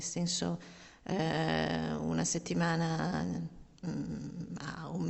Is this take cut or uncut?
uncut